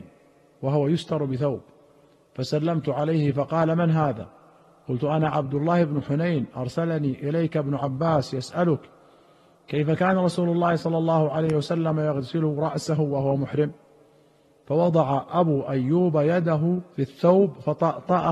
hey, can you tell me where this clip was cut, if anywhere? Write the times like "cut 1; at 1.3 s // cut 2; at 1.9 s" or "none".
cut 1; at 16.9 s